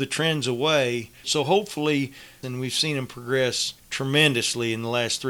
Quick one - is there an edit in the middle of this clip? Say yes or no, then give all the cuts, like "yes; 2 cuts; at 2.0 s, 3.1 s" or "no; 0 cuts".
yes; 3 cuts; at 1.2 s, 2.4 s, 3.8 s